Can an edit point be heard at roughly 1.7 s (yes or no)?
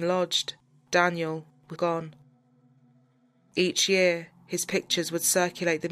yes